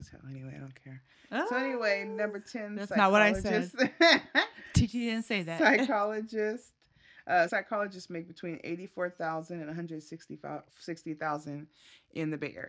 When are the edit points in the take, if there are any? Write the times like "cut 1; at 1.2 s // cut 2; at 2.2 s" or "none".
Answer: cut 1; at 7.5 s // cut 2; at 10.7 s